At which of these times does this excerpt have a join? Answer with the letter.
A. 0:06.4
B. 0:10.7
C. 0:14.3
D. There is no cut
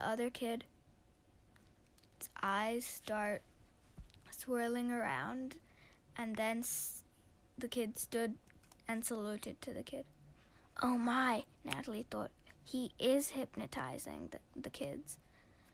D